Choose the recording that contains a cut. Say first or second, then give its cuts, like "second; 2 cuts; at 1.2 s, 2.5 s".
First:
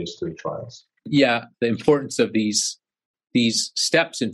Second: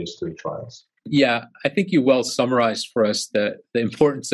first; 1 cut; at 1.5 s